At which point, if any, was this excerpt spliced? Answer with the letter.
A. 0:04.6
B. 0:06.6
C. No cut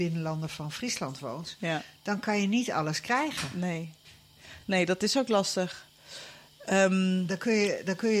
C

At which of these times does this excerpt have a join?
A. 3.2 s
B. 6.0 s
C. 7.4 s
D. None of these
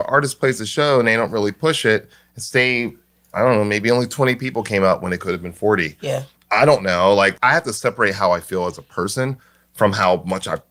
C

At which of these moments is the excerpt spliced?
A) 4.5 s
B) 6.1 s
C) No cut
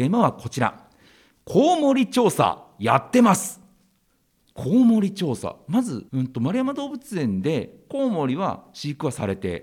B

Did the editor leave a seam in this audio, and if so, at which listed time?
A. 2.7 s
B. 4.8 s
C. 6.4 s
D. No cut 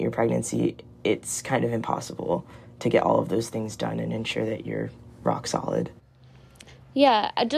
D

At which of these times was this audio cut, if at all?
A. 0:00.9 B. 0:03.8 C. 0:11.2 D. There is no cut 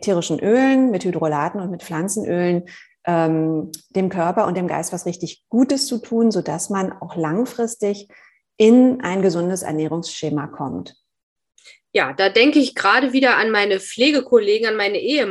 D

